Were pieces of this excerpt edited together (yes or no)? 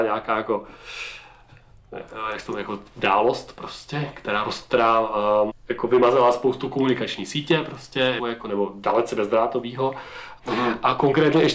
yes